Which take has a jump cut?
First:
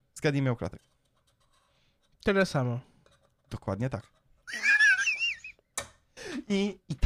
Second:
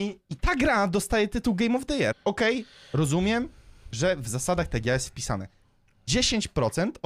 second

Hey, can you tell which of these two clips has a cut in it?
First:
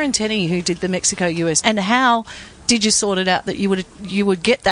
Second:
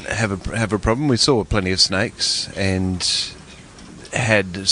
first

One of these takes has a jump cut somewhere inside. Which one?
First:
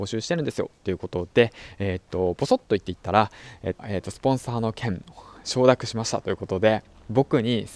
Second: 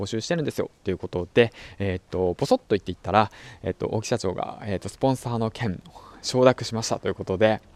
first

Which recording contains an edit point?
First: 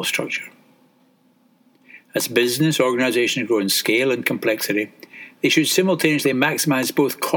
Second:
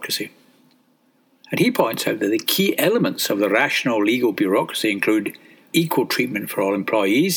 second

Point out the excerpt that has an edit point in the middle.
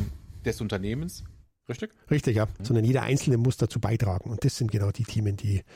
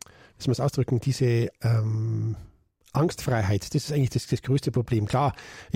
first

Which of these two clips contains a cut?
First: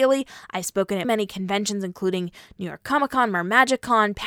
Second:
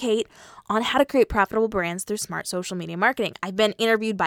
first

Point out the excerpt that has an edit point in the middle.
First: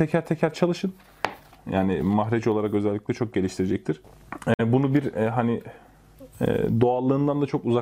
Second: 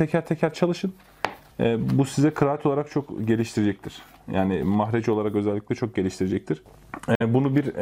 first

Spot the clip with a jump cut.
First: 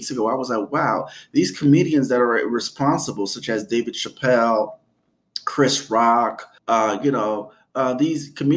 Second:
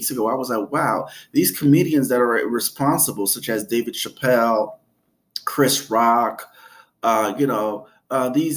first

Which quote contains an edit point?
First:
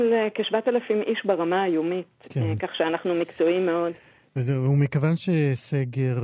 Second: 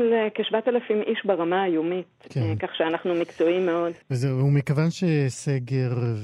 second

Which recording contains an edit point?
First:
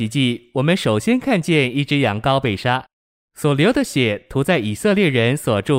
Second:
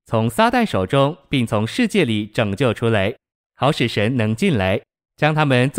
second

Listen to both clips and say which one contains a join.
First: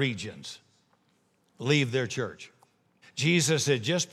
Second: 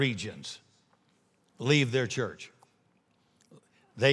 first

